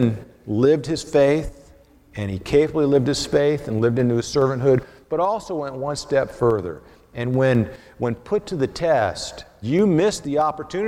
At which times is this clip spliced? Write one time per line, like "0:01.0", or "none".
0:09.6